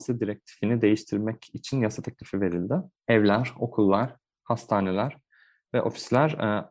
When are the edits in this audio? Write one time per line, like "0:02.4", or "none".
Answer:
0:03.0